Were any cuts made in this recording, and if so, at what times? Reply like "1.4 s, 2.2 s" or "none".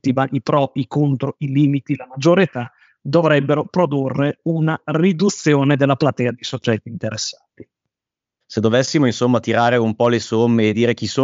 8.4 s